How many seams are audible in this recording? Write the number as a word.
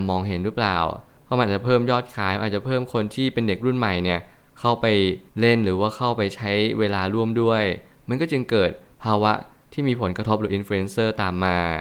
one